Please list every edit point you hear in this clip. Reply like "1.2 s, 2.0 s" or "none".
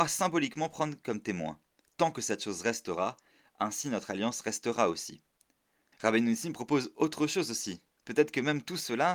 5.9 s